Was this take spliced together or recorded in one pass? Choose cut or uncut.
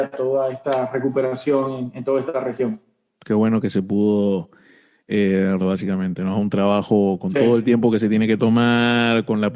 cut